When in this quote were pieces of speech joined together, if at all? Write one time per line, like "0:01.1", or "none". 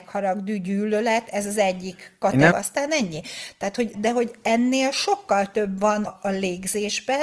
0:02.5
0:03.9
0:06.1